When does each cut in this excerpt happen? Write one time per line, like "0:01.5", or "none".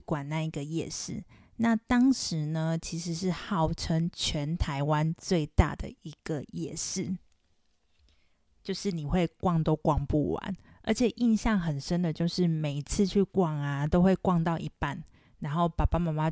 none